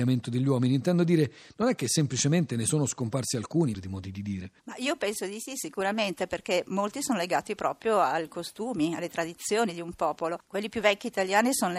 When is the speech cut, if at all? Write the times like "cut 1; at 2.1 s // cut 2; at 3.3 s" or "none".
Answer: cut 1; at 3.7 s